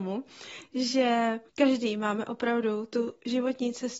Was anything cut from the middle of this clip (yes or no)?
yes